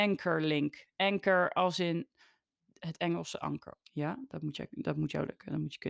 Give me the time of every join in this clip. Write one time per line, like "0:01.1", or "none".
0:03.8